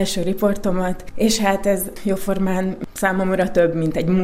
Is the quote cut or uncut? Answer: uncut